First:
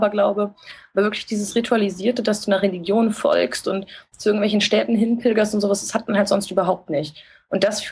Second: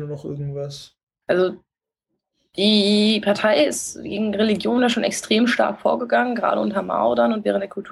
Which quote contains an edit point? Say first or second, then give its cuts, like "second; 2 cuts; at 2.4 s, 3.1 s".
second; 1 cut; at 1.2 s